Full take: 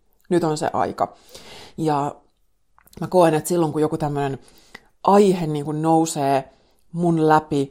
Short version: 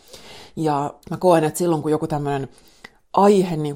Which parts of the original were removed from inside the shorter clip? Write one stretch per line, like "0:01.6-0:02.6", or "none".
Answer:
0:02.2-0:02.9